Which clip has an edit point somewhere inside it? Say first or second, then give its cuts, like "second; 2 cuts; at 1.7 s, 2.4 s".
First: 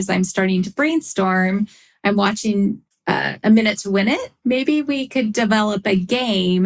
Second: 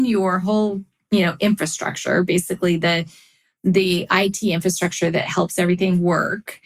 first; 1 cut; at 4.4 s